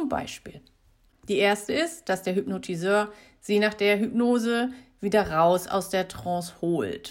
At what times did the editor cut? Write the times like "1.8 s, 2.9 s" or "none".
1.1 s